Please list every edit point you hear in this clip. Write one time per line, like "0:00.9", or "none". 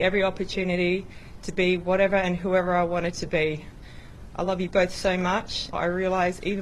0:05.7